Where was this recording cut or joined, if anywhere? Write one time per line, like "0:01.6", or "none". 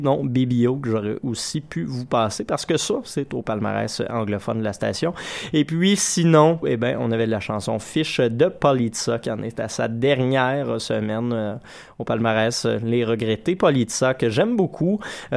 0:06.6